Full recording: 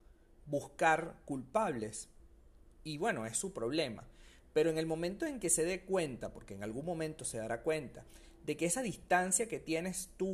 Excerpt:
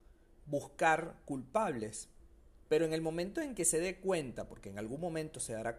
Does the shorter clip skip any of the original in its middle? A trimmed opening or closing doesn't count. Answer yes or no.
yes